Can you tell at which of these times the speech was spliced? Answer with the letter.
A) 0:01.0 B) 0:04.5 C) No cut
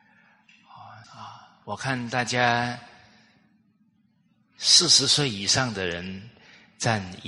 A